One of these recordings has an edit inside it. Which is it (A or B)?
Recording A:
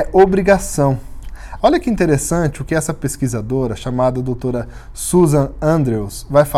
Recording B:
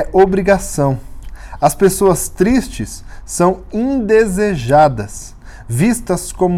A